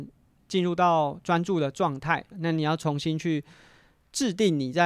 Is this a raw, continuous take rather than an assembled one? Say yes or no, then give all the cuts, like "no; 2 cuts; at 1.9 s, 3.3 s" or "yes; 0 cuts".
no; 1 cut; at 2.3 s